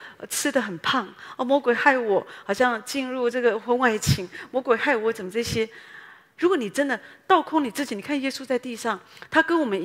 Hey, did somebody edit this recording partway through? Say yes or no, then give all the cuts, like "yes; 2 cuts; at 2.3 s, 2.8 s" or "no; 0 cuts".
yes; 1 cut; at 6.4 s